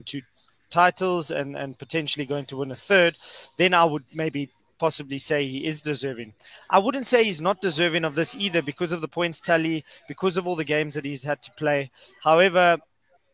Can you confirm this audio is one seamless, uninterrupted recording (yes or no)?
yes